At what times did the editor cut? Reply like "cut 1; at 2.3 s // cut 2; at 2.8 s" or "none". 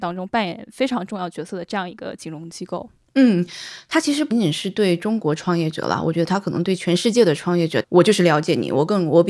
cut 1; at 4.3 s // cut 2; at 7.8 s